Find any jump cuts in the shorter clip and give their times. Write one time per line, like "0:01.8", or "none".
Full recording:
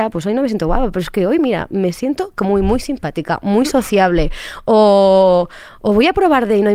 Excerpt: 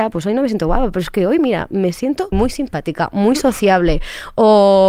0:02.3